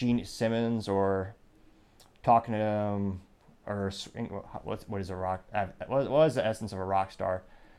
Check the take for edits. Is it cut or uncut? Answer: uncut